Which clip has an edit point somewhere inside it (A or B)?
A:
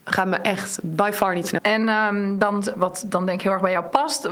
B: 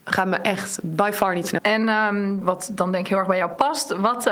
B